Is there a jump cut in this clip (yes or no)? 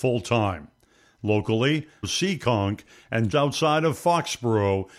yes